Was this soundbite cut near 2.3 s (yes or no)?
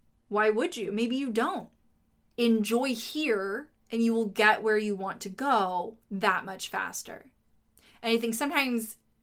yes